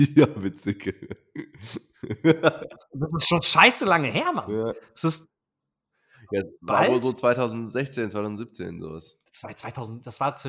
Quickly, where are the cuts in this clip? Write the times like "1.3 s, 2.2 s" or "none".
9.3 s